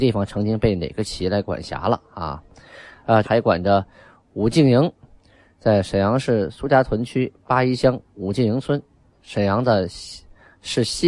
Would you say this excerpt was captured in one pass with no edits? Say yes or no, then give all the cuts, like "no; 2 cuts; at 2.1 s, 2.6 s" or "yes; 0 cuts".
no; 2 cuts; at 3.2 s, 9.1 s